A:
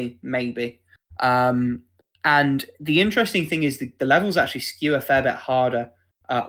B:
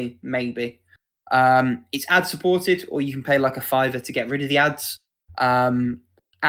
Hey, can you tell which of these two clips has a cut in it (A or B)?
A